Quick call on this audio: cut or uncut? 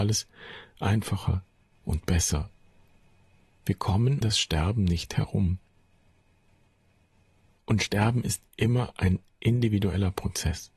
cut